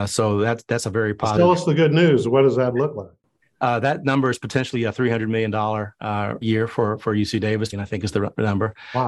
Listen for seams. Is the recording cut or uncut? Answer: cut